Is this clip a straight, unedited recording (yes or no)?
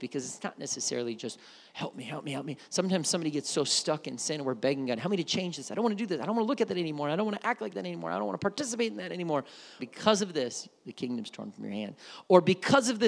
no